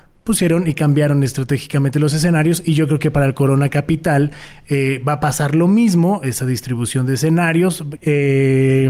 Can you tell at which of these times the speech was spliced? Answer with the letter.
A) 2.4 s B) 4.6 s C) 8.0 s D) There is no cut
C